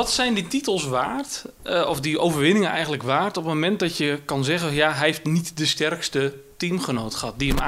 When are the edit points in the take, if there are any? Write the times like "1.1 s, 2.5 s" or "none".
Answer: none